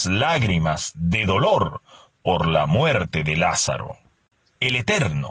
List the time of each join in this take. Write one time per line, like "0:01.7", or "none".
none

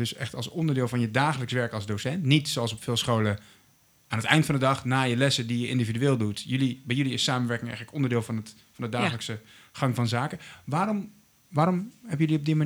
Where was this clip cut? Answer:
none

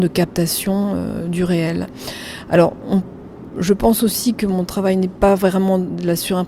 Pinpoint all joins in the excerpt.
none

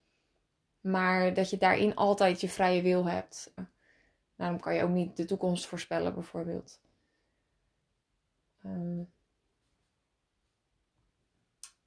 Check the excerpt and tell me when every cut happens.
0:03.6

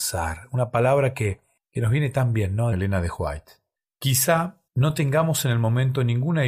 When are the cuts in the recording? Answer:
0:02.7
0:04.7

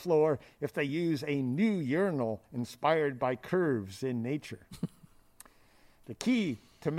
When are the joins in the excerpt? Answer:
none

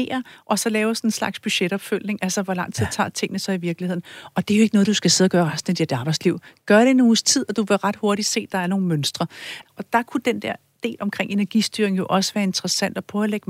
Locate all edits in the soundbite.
0:09.6

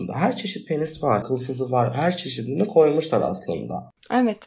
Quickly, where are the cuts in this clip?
0:01.2

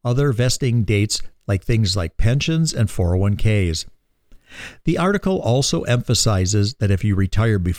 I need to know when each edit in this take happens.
none

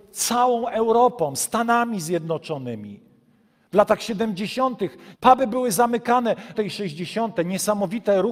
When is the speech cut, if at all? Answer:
0:05.2
0:06.5

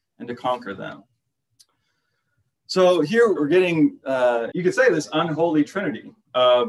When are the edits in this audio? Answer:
0:03.4
0:04.5

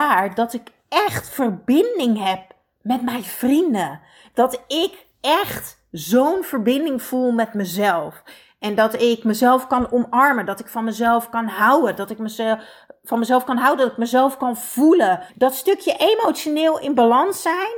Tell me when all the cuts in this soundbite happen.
0:04.2
0:15.3

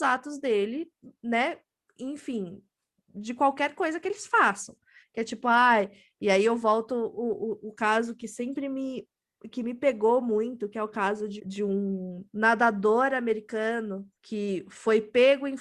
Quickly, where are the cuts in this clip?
0:11.4
0:14.1

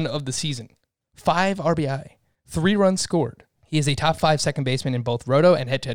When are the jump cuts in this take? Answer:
0:03.5

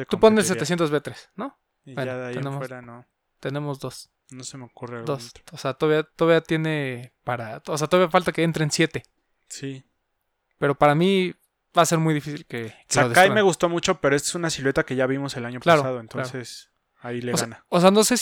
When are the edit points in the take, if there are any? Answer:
none

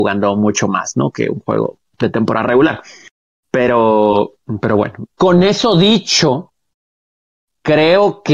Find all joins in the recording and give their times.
0:05.1

